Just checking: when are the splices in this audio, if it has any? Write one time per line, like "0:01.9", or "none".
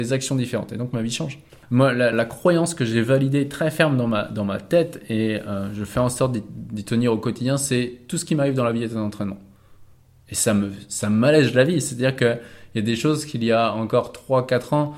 0:02.1